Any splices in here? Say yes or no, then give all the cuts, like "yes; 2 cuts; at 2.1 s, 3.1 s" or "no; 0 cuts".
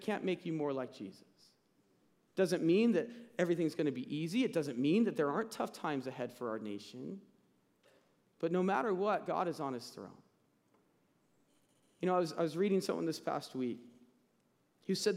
no; 0 cuts